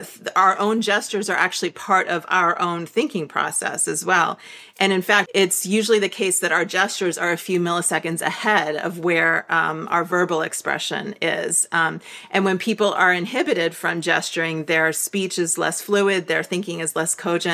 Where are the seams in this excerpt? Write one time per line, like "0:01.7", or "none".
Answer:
0:05.3